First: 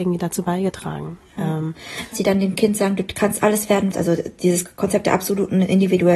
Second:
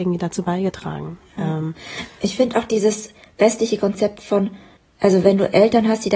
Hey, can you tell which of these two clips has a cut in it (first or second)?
first